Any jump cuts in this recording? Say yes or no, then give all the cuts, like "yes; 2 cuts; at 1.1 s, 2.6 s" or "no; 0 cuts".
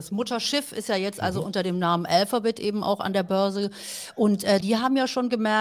yes; 1 cut; at 4.6 s